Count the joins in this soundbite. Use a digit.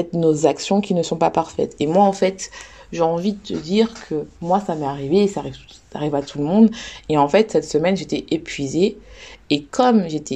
0